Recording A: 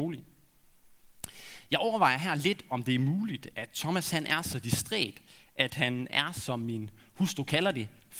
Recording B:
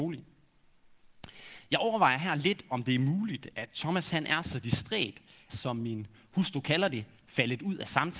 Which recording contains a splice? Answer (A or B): B